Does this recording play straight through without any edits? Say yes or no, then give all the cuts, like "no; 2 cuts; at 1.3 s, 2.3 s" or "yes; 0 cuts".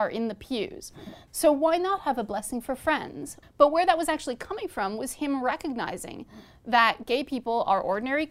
no; 2 cuts; at 1.3 s, 3.4 s